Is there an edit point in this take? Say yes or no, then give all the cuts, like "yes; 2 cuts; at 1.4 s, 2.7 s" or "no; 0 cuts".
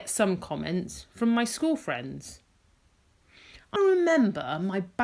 yes; 1 cut; at 3.8 s